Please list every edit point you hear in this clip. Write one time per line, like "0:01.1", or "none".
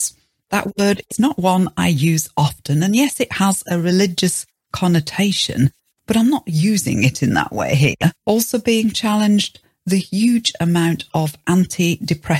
0:08.2